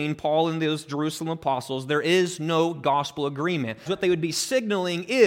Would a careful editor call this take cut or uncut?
cut